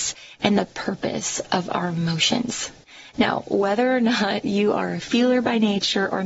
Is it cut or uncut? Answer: uncut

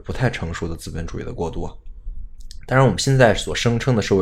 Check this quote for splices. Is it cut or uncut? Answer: uncut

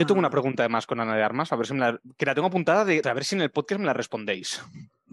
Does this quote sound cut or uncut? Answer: cut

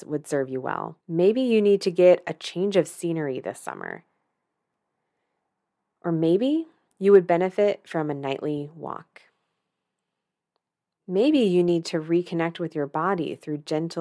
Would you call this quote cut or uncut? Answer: cut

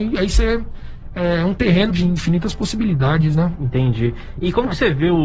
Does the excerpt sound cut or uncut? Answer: cut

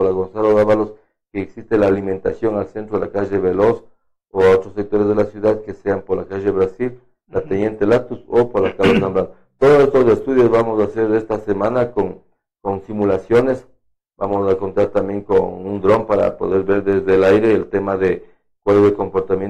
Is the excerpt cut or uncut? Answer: uncut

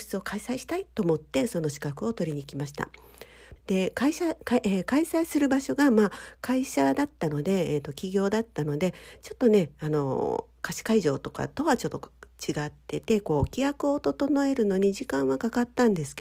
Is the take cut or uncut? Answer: cut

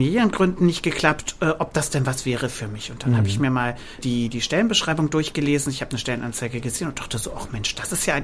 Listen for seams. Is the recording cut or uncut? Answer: uncut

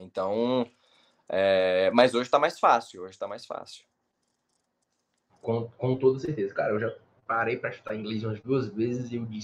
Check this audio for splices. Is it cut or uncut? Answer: uncut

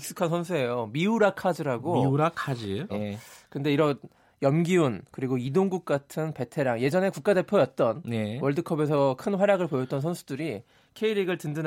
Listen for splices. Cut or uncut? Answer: cut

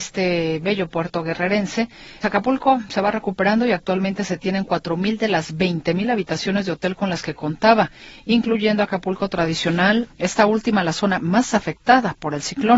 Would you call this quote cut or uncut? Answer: cut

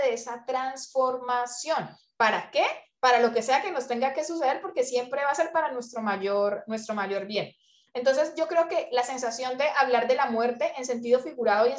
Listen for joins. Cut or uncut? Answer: uncut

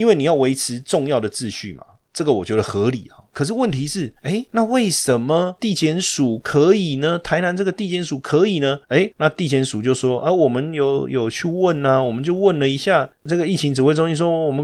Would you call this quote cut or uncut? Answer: uncut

